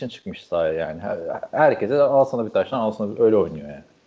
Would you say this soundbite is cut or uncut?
cut